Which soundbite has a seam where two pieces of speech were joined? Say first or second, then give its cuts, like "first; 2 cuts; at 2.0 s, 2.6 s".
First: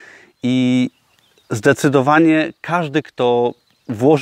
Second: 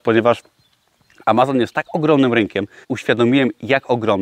second; 1 cut; at 2.8 s